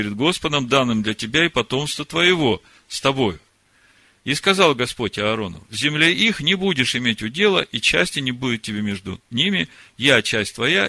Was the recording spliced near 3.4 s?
no; 0 cuts

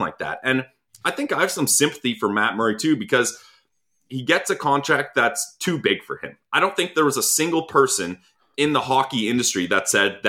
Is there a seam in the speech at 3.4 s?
no; 0 cuts

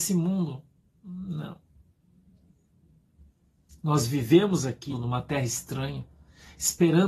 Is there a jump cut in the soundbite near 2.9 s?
no; 1 cut; at 4.9 s

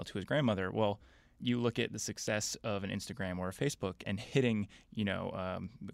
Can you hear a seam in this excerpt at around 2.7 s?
no; 2 cuts; at 1.4 s, 4.0 s

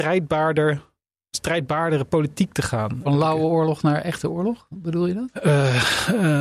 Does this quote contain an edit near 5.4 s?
no; 0 cuts

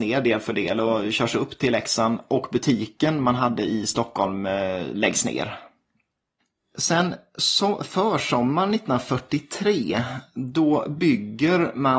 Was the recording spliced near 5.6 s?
no; 0 cuts

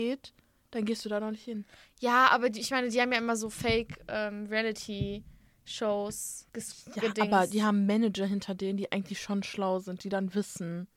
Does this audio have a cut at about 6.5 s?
yes; 1 cut; at 6.5 s

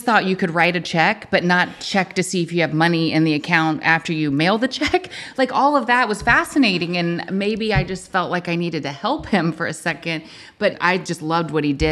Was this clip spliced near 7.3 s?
no; 0 cuts

